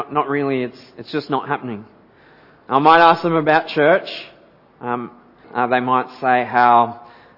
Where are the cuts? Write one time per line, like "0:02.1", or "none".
0:05.4